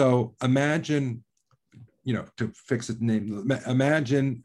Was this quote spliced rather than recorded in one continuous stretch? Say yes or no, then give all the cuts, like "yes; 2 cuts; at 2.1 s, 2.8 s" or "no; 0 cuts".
yes; 1 cut; at 1.9 s